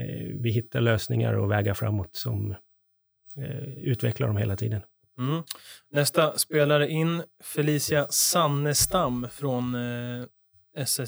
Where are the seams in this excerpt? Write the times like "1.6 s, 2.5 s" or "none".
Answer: none